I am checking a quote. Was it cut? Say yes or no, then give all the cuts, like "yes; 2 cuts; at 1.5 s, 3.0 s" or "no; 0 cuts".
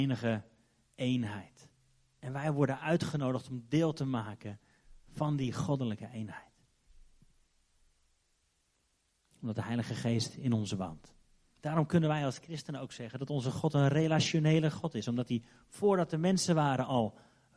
yes; 1 cut; at 11.6 s